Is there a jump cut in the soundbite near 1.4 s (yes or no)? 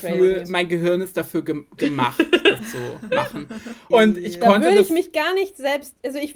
no